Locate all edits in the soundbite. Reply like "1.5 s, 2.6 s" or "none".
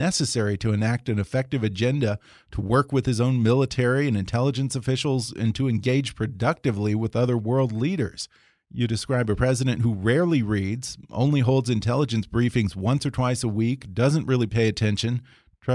none